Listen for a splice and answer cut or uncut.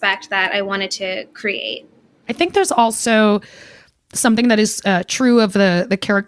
uncut